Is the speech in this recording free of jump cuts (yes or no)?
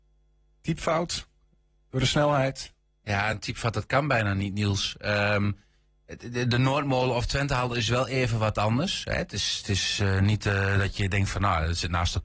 yes